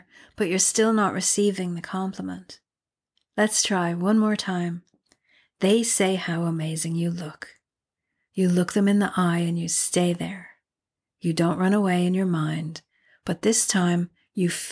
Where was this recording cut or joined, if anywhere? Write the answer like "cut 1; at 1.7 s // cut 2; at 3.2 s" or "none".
none